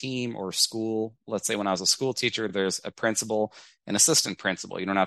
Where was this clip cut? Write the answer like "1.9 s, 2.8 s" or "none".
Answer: none

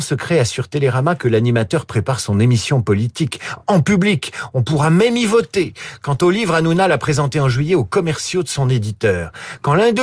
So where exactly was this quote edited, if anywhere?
none

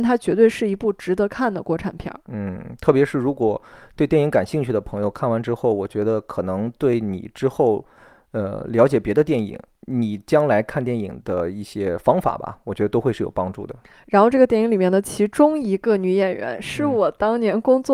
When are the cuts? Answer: none

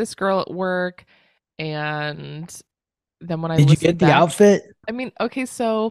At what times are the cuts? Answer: 4.8 s

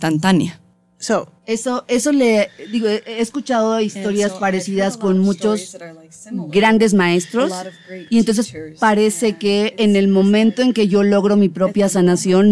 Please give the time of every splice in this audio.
none

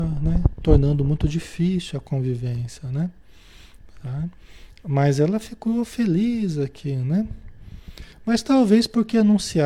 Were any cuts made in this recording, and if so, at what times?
none

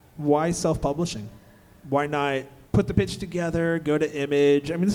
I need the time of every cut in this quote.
2.7 s

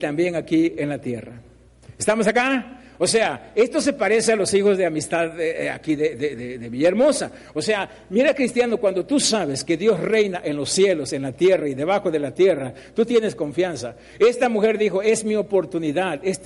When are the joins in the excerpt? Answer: none

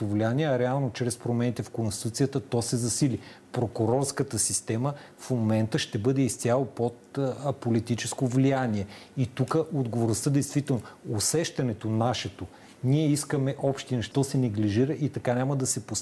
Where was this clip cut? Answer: 14.1 s

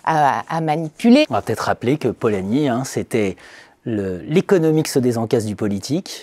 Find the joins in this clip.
1.2 s

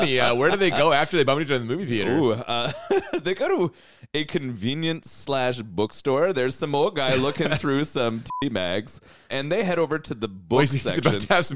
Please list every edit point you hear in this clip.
none

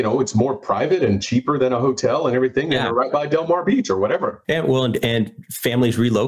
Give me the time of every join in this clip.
4.4 s

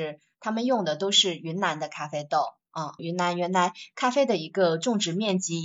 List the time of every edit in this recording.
3.0 s

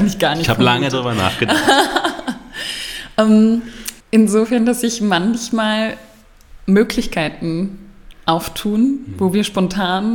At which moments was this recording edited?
4.0 s

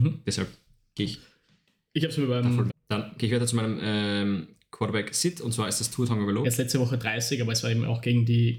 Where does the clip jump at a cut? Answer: 2.7 s, 6.4 s

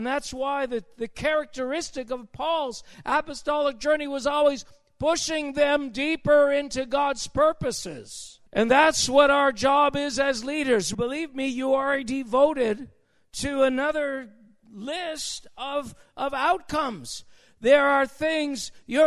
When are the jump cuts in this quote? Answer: 8.5 s, 10.9 s

